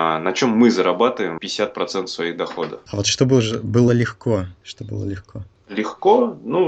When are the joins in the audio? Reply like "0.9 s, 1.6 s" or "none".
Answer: 1.4 s, 2.9 s